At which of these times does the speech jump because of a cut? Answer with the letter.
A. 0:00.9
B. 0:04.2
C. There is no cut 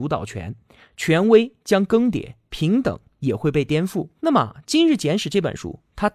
B